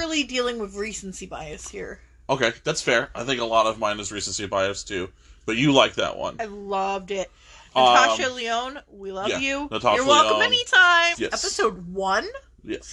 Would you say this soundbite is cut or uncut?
cut